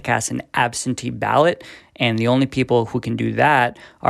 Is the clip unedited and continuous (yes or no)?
yes